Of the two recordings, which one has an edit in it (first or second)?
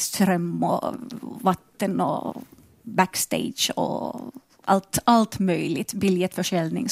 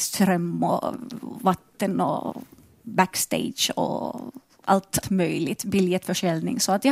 second